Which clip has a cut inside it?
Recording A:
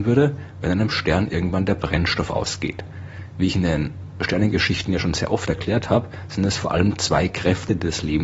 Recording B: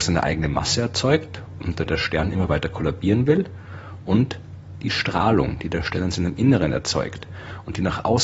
B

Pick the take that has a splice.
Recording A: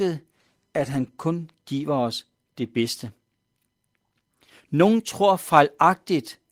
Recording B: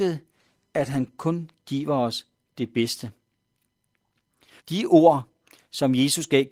B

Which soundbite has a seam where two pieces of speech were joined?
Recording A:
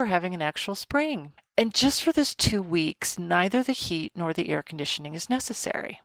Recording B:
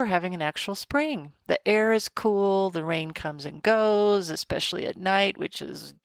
A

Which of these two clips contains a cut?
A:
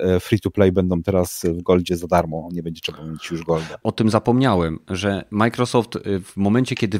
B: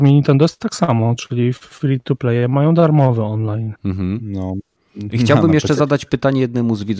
A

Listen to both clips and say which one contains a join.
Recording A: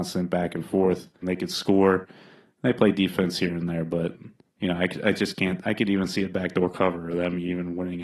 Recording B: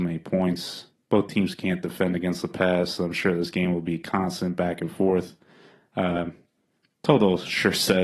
A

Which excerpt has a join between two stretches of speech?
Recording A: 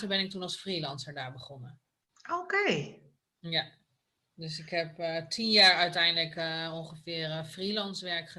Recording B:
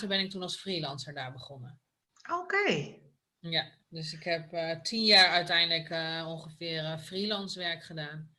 B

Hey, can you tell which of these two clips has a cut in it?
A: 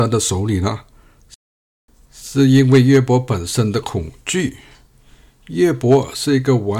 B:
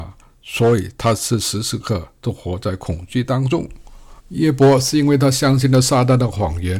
B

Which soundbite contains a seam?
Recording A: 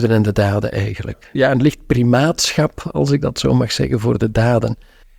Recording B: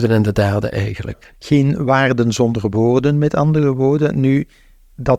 B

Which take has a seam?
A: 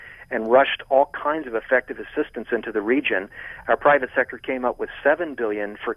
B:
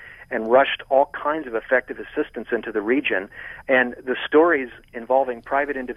B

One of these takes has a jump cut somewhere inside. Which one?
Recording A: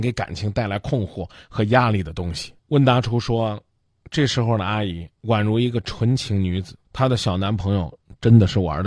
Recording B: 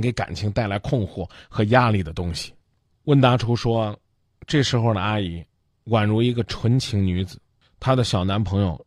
A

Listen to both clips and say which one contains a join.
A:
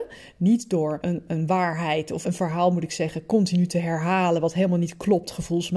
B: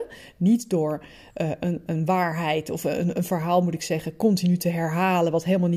A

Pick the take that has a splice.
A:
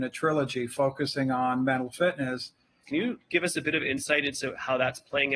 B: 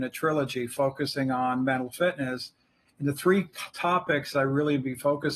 A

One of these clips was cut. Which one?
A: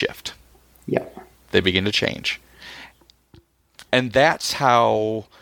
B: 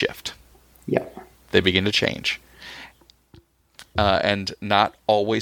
A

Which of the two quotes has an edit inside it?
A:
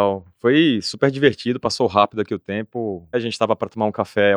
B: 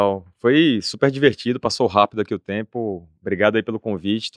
A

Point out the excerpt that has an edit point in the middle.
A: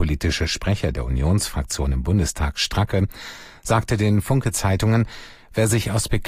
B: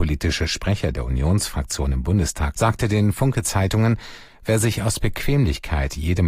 B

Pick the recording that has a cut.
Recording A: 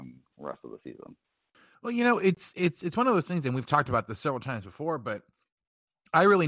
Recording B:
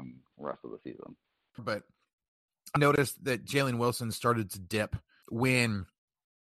B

